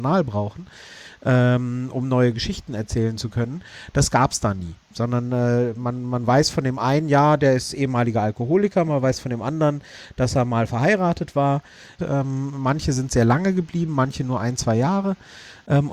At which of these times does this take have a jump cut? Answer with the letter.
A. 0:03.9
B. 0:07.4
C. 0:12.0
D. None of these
C